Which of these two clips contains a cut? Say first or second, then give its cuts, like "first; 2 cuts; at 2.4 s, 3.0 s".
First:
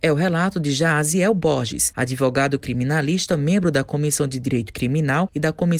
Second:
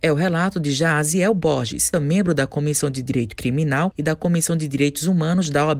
second; 1 cut; at 1.9 s